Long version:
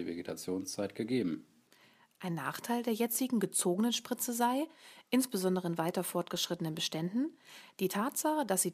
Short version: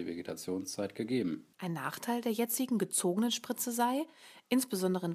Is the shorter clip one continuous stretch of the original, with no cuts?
no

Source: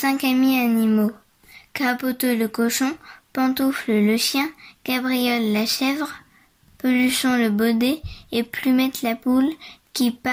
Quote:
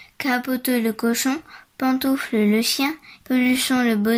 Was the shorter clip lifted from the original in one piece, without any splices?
no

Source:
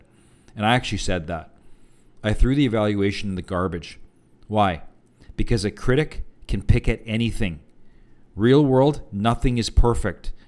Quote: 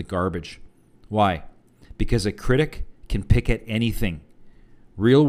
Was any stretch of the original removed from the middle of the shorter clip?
no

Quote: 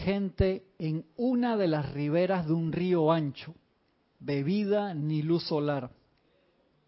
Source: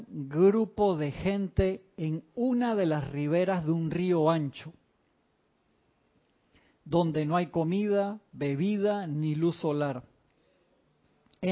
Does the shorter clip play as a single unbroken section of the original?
no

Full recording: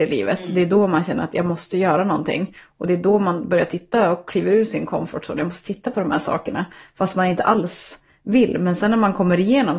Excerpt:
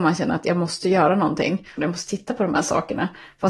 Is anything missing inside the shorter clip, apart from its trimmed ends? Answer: yes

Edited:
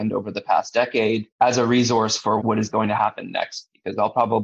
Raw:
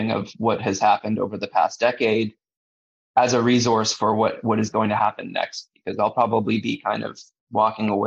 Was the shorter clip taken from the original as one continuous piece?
no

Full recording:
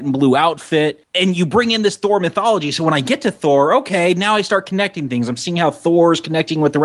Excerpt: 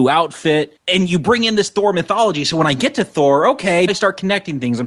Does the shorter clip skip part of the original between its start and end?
yes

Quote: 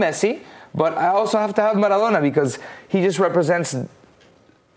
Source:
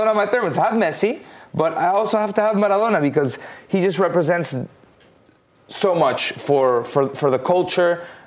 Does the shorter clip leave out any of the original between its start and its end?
no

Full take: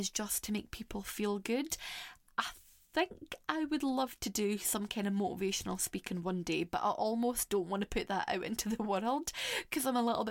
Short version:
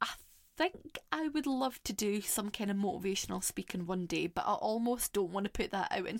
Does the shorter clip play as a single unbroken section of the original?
yes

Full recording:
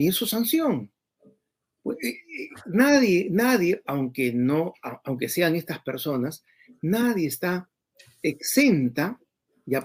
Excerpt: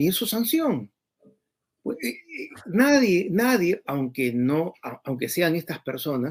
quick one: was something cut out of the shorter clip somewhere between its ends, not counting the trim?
no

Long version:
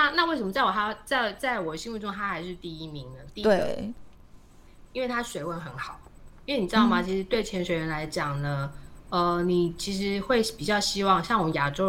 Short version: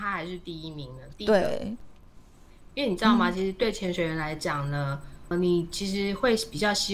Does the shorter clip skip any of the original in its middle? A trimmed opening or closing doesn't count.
yes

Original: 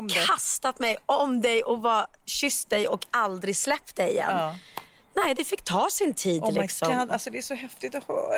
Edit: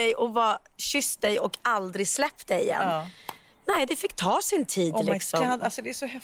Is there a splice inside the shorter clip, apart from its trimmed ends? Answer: no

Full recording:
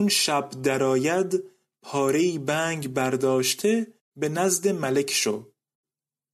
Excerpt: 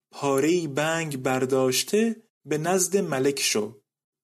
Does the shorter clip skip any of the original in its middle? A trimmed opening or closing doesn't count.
no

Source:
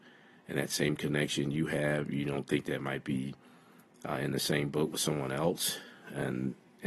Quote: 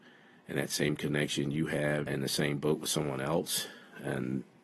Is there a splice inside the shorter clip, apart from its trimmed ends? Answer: yes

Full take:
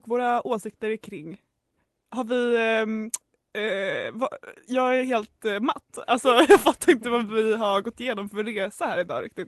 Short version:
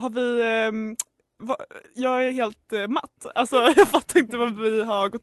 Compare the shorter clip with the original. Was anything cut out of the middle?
yes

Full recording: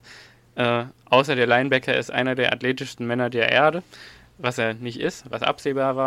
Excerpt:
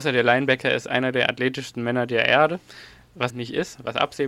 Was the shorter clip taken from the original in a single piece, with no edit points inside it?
no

